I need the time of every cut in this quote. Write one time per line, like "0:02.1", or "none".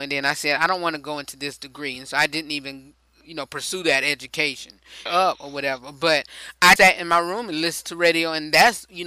0:05.1
0:06.8